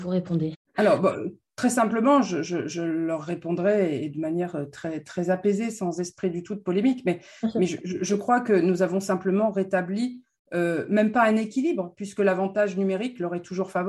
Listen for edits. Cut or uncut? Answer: uncut